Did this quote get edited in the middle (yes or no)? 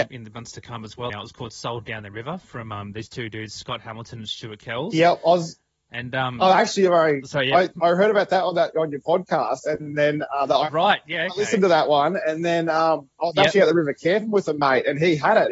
yes